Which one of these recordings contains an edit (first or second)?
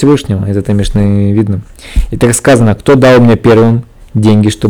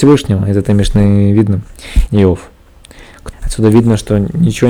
second